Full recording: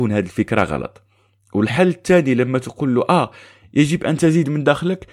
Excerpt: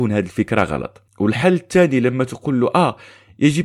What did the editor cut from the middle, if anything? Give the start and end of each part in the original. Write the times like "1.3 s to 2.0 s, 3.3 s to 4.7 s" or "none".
1.1 s to 1.4 s